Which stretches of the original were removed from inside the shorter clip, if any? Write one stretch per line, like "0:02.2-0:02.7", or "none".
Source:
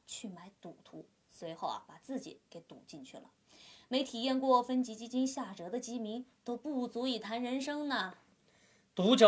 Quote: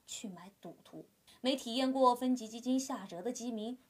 0:01.3-0:03.7